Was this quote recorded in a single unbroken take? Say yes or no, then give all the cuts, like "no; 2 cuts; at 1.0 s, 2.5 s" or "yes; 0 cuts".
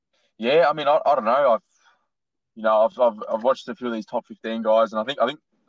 yes; 0 cuts